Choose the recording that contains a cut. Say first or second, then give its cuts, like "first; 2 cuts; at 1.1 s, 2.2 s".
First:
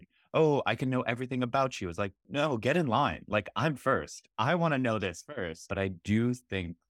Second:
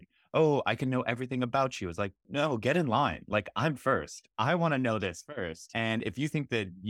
first; 1 cut; at 5.7 s